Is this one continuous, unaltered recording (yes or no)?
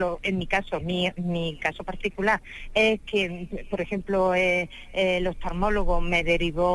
yes